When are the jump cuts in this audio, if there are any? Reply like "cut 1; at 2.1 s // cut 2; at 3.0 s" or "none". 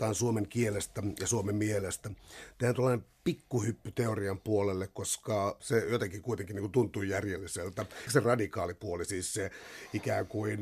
cut 1; at 5.6 s // cut 2; at 8.1 s